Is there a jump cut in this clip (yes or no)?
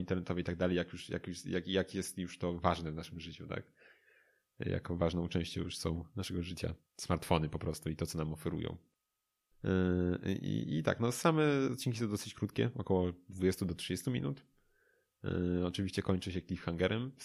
no